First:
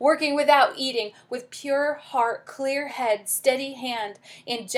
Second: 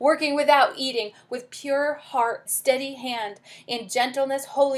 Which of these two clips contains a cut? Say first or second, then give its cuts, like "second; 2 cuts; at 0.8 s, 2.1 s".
second; 1 cut; at 2.5 s